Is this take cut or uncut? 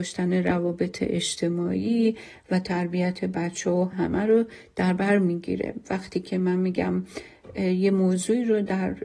cut